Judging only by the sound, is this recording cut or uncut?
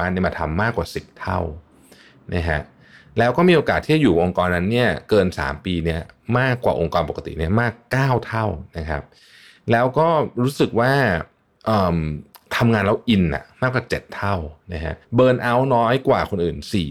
cut